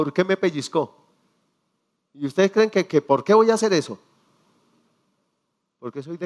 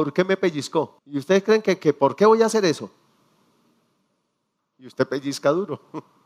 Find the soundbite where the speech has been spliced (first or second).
second